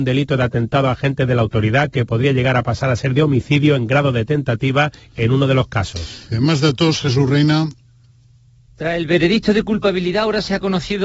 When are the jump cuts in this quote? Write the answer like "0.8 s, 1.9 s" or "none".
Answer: 6.3 s

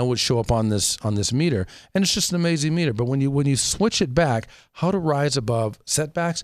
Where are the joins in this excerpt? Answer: none

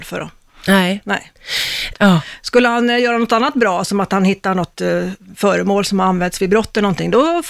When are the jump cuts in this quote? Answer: 1.9 s

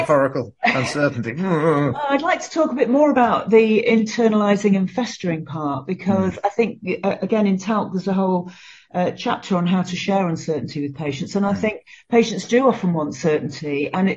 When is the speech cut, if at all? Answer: none

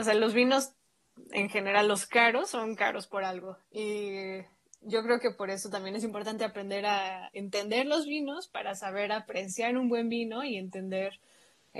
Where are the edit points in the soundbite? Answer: none

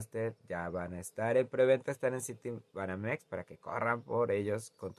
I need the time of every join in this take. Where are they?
none

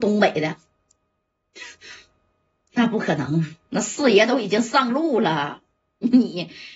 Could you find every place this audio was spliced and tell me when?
none

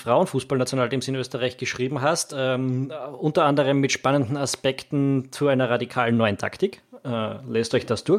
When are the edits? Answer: none

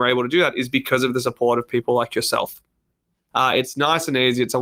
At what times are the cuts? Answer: 3.3 s

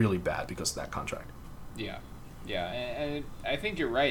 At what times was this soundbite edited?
none

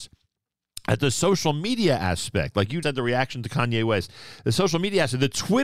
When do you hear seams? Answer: 2.8 s

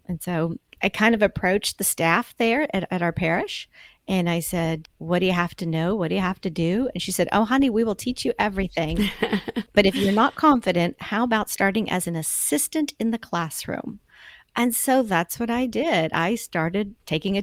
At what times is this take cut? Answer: none

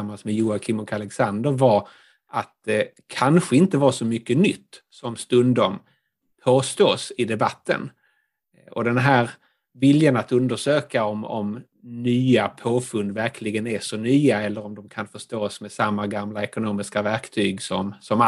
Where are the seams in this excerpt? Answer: none

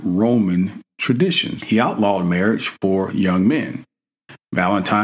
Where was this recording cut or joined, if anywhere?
1.6 s

